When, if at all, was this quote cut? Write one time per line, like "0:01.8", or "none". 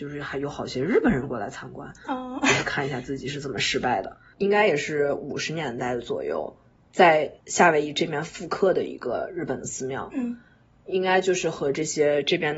0:04.3